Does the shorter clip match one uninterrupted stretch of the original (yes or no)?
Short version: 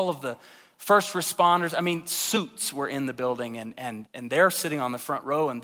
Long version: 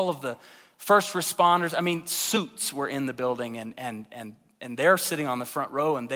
no